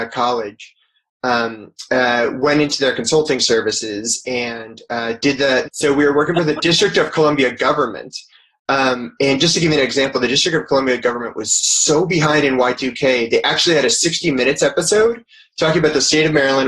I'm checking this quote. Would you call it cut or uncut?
cut